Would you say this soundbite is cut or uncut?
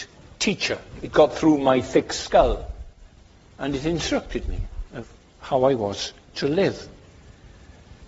uncut